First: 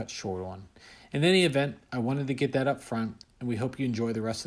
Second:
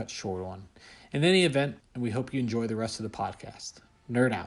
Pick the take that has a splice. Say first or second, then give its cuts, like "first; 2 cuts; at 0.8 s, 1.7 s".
second; 1 cut; at 1.8 s